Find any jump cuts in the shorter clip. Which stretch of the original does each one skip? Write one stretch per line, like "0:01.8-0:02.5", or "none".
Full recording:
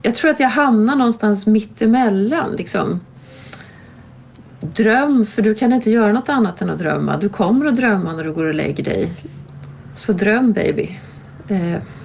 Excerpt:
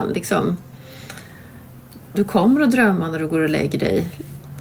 0:04.6-0:07.2